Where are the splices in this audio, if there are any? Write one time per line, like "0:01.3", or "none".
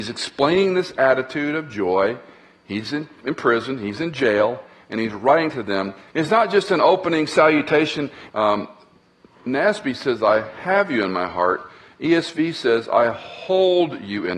0:06.1
0:08.3